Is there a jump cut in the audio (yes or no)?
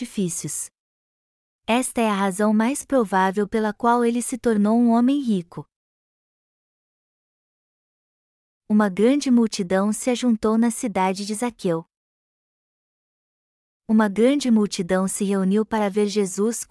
no